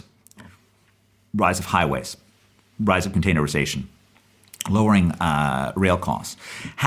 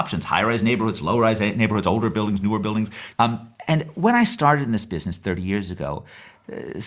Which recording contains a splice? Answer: second; 1 cut; at 3.1 s

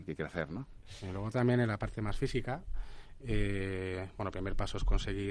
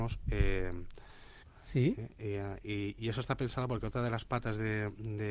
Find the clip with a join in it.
second; 1 cut; at 1.4 s

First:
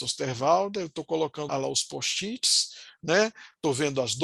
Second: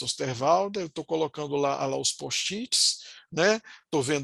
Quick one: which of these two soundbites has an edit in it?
first; 1 cut; at 1.5 s

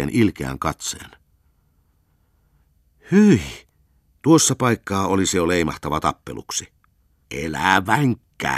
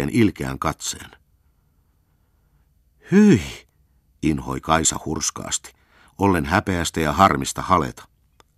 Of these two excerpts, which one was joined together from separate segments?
first; 2 cuts; at 4.2 s, 7.2 s

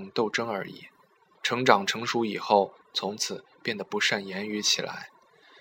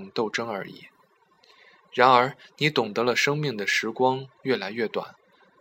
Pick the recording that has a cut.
first; 2 cuts; at 1.3 s, 2.8 s

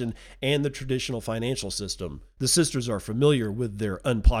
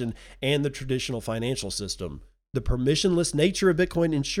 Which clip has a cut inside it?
first; 1 cut; at 2.4 s

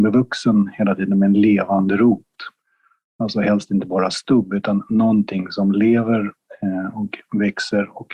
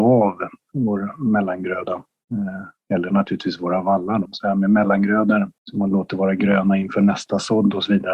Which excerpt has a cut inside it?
second; 2 cuts; at 4.3 s, 5.6 s

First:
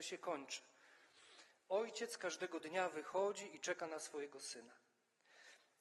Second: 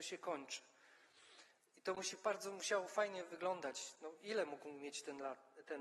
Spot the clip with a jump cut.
second; 1 cut; at 1.6 s

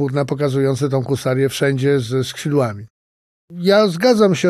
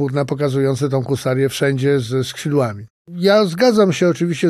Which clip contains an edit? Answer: second; 1 cut; at 3.0 s

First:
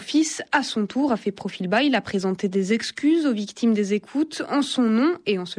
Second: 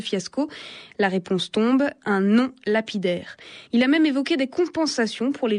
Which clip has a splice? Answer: second; 1 cut; at 3.7 s

